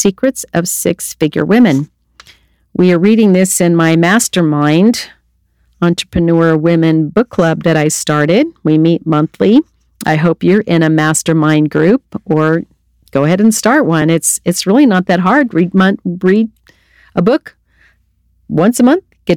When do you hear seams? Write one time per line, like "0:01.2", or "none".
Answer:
none